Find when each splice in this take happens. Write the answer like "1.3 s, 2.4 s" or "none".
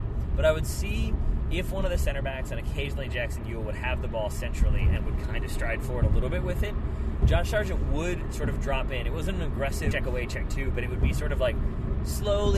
9.9 s

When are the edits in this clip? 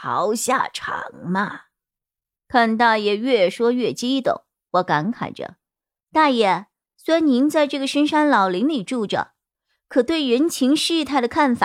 none

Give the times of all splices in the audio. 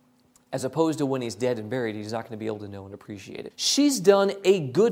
3.5 s

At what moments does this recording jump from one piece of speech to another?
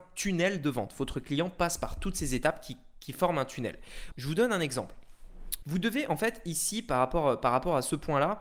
4.1 s, 5.6 s

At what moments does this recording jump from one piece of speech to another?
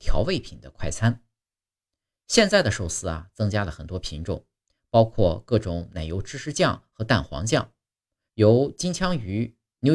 8.3 s

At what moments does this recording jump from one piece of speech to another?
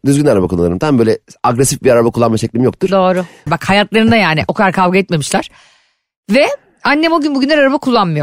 3.5 s

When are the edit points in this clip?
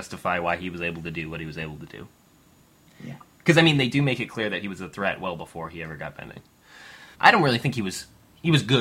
7.1 s

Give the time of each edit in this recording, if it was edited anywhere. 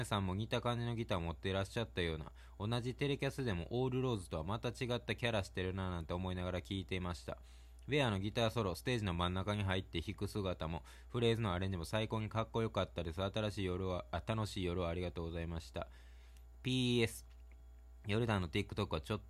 none

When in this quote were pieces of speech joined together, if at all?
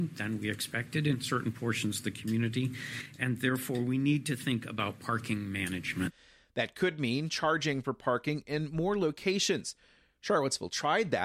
none

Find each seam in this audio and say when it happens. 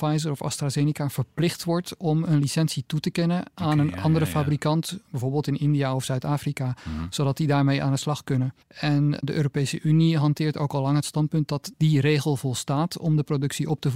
8.6 s

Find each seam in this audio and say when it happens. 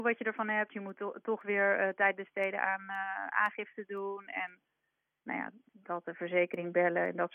none

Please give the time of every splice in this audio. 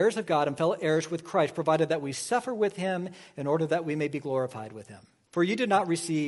5.3 s

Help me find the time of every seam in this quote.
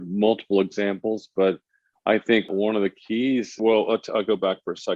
none

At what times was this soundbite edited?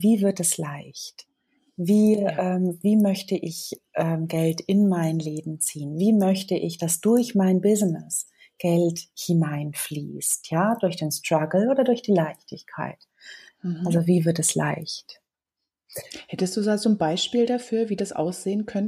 none

